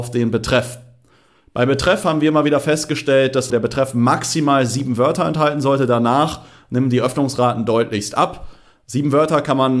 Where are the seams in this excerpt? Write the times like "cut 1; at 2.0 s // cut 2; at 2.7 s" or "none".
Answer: cut 1; at 3.5 s